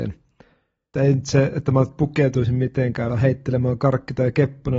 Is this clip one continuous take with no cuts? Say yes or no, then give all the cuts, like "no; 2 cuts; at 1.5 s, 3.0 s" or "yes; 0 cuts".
no; 2 cuts; at 0.9 s, 3.1 s